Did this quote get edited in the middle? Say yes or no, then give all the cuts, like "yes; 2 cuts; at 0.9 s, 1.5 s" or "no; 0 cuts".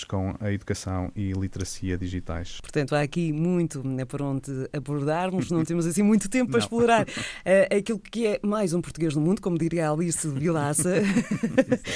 no; 0 cuts